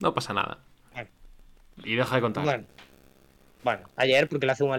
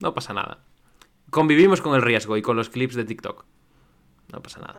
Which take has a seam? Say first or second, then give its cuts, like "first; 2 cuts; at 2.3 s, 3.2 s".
first; 1 cut; at 0.9 s